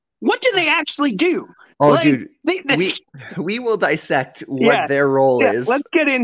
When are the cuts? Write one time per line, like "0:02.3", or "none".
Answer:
none